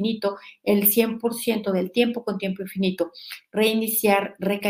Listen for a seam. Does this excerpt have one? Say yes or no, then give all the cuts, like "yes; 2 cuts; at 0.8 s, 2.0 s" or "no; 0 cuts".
no; 0 cuts